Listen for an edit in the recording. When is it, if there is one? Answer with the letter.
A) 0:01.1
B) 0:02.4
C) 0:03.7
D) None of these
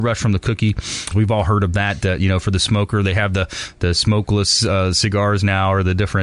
A